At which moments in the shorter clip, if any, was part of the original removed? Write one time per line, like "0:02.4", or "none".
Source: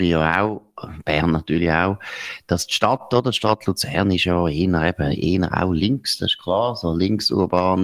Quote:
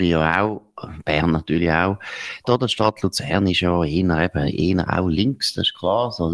0:02.4